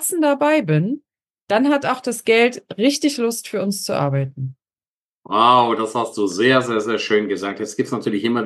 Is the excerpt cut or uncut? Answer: uncut